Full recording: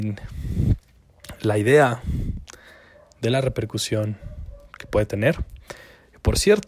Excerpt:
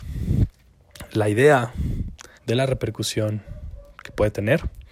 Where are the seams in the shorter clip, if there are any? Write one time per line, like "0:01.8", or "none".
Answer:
0:02.4

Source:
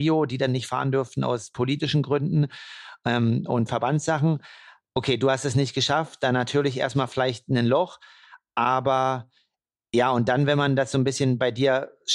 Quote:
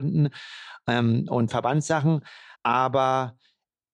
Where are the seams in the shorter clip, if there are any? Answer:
0:02.5

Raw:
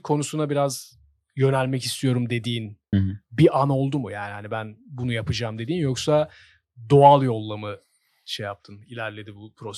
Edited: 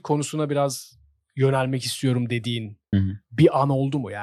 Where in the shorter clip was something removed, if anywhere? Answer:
none

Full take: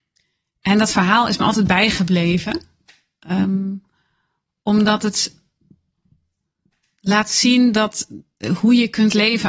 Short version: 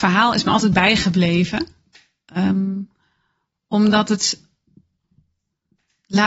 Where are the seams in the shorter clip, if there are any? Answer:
none

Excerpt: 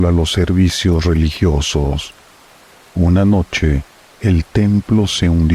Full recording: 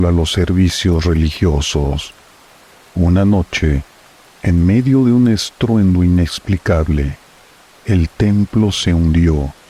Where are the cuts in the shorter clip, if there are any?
0:04.1

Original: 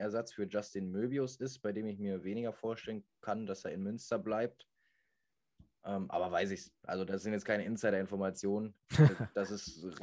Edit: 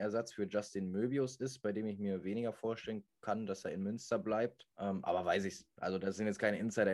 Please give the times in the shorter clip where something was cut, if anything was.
0:04.7

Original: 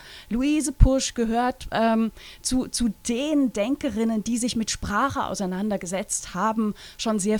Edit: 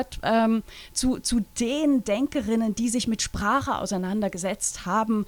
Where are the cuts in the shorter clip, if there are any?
none

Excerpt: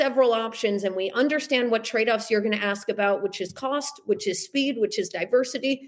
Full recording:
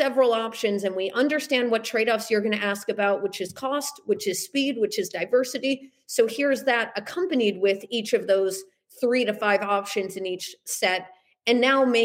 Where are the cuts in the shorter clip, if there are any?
none

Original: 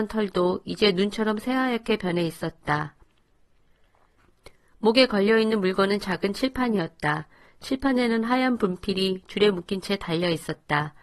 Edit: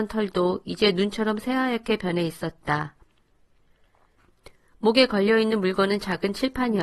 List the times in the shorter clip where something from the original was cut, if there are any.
none

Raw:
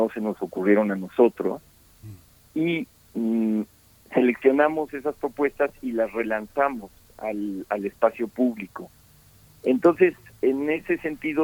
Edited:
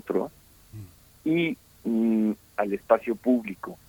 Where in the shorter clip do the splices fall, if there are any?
0:02.5

